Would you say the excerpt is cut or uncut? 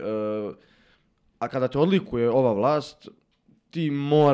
uncut